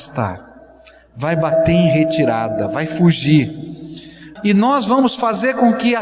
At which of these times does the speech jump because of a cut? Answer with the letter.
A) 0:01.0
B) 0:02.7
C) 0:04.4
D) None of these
C